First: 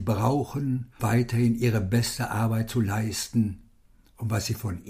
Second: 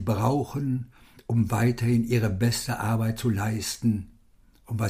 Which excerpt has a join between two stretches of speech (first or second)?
first